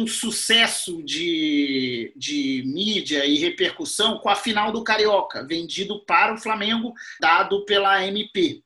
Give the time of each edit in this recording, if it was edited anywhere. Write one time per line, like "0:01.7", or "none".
0:07.2